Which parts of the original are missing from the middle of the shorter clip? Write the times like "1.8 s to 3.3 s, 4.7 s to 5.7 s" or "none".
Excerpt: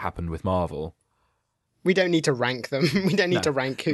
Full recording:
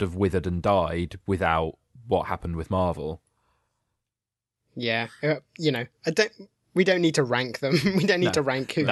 3.9 s to 6.6 s